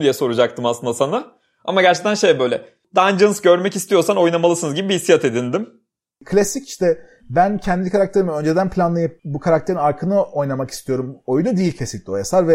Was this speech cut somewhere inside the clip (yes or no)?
no